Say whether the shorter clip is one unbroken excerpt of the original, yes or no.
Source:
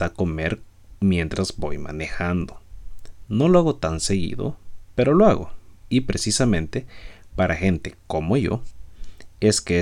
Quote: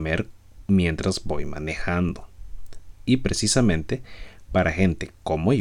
no